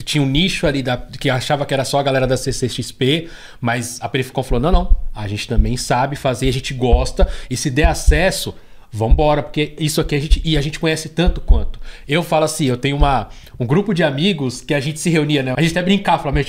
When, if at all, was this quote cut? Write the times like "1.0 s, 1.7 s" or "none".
15.6 s